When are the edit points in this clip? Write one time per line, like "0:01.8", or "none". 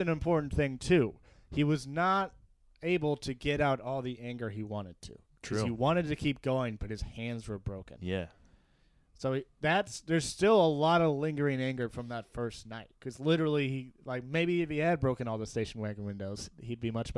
none